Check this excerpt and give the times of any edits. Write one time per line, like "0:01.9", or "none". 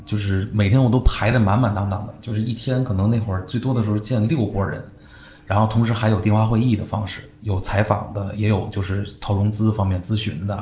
none